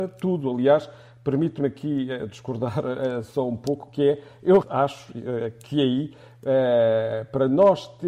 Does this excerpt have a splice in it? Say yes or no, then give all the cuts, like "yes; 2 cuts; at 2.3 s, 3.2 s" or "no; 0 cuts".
yes; 1 cut; at 4.6 s